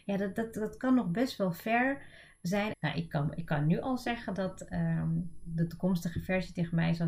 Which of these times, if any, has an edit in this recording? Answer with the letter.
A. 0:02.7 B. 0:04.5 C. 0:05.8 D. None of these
A